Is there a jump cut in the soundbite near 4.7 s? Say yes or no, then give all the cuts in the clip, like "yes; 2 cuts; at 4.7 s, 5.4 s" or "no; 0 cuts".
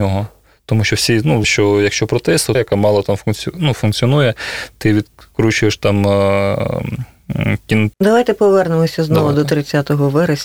no; 3 cuts; at 1.4 s, 2.5 s, 7.9 s